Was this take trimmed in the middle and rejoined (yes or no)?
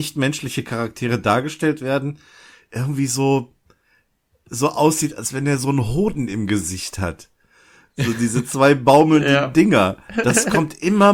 no